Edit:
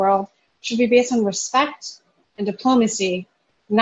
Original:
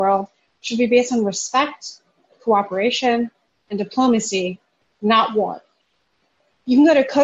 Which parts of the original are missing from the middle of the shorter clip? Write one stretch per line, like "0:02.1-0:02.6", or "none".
0:02.2-0:03.6